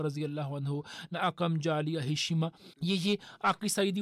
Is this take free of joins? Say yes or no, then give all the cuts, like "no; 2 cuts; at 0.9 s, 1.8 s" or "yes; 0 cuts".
no; 1 cut; at 2.7 s